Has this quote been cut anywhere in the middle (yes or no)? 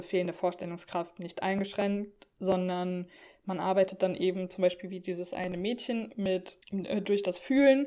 yes